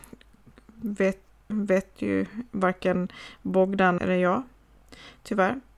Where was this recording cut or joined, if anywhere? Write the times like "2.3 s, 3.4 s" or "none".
1.5 s, 4.0 s